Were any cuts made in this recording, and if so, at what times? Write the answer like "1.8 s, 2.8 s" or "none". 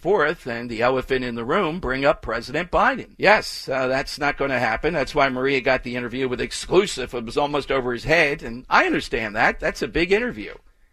3.1 s